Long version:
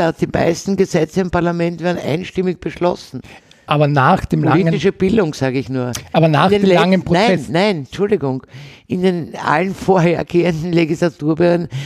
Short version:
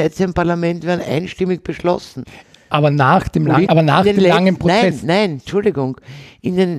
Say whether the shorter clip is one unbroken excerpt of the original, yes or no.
no